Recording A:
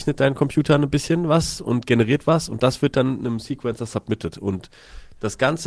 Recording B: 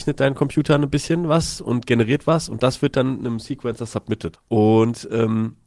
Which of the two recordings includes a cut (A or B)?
B